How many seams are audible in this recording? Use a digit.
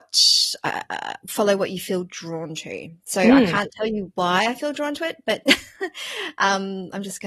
0